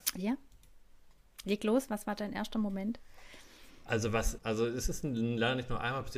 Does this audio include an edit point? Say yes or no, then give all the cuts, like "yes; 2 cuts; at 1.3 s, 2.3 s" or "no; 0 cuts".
yes; 1 cut; at 4.4 s